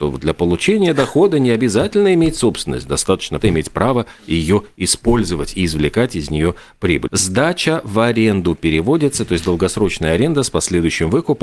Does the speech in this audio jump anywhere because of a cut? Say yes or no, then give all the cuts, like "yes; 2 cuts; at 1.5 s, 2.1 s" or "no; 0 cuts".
yes; 2 cuts; at 3.4 s, 7.1 s